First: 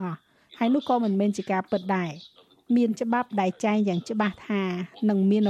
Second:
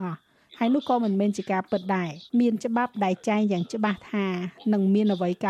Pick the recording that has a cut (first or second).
second